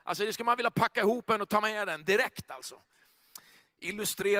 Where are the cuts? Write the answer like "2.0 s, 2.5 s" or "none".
none